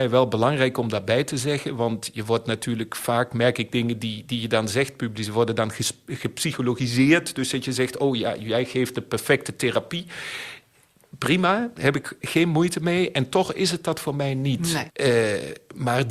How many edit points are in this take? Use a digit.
1